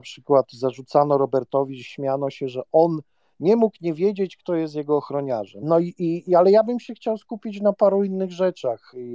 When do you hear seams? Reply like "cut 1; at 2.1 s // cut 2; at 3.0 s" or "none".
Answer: cut 1; at 5.6 s